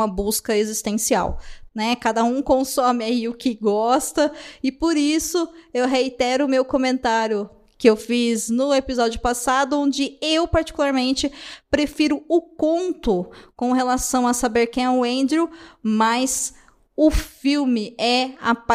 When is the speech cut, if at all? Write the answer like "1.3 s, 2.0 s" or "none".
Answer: 1.7 s

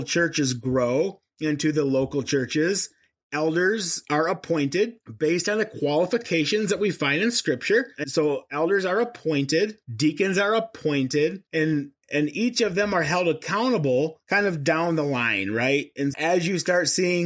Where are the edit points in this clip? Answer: 8.0 s, 16.1 s

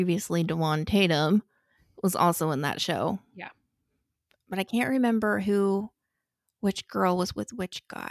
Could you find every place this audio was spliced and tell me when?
none

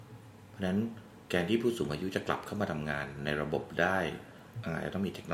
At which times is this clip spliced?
none

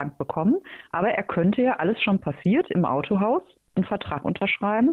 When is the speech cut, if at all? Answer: none

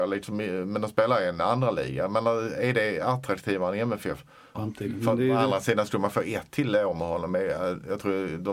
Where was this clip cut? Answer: 4.5 s

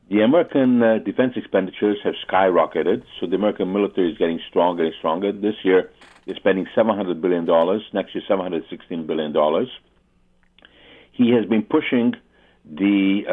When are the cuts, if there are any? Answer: none

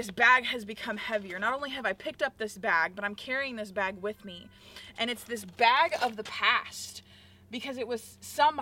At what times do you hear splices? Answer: none

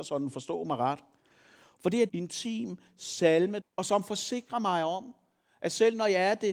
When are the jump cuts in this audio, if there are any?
2.1 s, 3.6 s

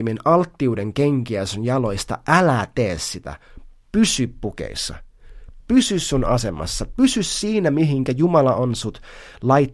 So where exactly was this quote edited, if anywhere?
5.6 s

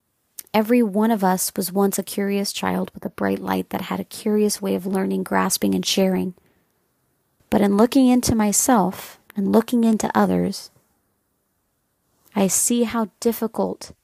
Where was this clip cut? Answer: 7.4 s, 9.3 s

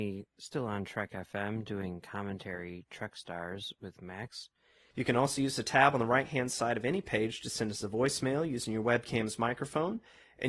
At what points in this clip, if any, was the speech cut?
4.9 s

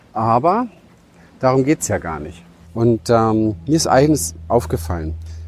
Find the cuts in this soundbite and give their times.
2.6 s

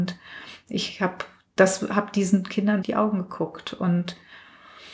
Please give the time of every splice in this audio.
2.8 s

